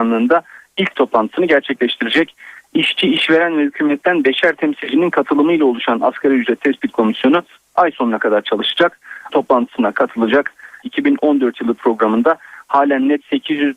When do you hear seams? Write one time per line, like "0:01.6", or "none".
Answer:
0:09.3
0:10.8